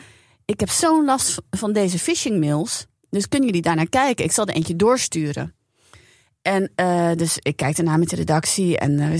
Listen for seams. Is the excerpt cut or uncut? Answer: uncut